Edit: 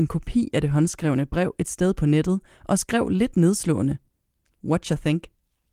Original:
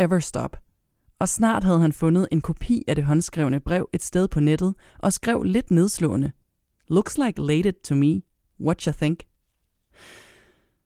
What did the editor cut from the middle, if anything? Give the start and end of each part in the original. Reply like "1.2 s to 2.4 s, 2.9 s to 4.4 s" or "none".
6.9 s to 8.5 s